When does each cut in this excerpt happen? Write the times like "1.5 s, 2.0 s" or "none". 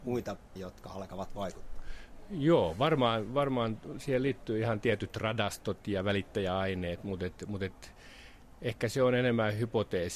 none